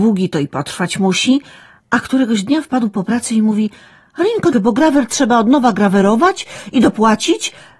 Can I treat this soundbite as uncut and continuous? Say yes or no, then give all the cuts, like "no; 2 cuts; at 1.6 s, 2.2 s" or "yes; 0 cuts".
no; 1 cut; at 4.5 s